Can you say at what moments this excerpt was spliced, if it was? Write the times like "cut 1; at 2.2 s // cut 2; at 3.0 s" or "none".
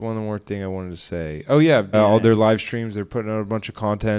cut 1; at 1.9 s